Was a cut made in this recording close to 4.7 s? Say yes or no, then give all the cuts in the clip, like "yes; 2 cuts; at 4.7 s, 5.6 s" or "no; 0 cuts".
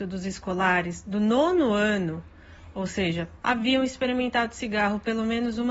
no; 1 cut; at 3.4 s